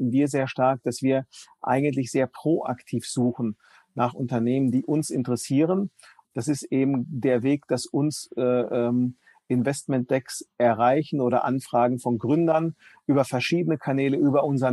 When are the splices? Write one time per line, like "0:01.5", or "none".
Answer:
0:06.2